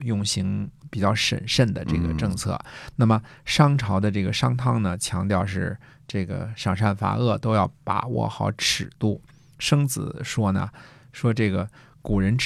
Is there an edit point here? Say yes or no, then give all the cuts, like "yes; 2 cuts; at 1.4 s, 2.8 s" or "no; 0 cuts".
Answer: no; 0 cuts